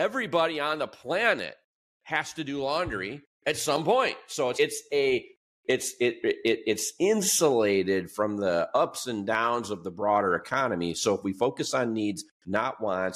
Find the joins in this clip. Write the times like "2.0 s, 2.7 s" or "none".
4.6 s